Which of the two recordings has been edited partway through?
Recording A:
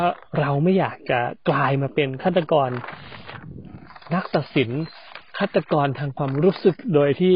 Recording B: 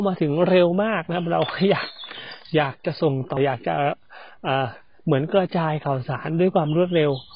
B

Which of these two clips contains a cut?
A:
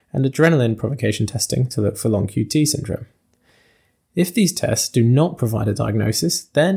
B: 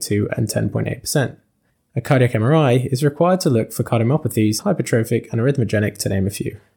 B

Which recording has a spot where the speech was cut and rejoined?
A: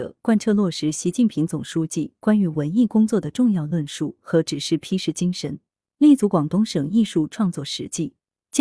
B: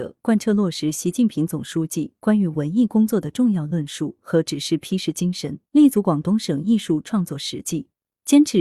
B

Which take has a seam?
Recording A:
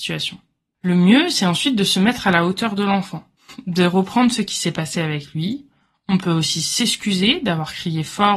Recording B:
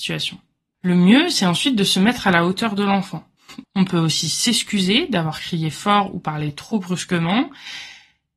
B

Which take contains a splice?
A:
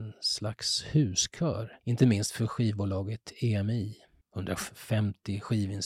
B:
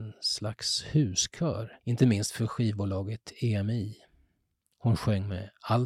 A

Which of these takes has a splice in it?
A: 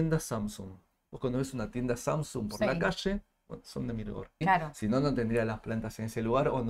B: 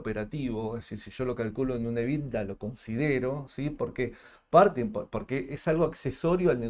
A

